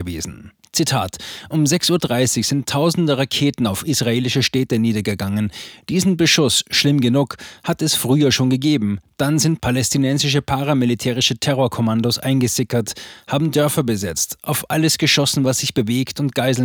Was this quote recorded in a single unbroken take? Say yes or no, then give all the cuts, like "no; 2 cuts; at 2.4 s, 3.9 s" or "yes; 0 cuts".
yes; 0 cuts